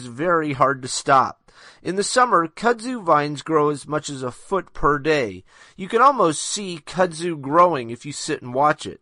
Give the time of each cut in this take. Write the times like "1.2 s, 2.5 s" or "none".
none

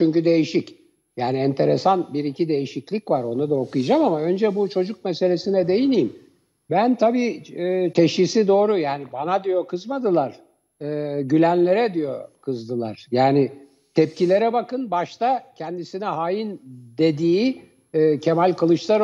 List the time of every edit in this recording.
7.9 s

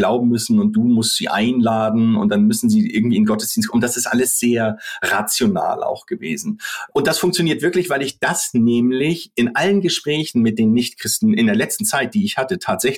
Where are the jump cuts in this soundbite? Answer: 6.9 s

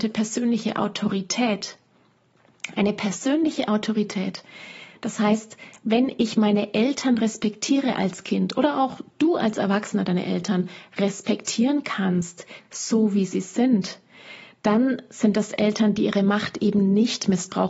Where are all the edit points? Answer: none

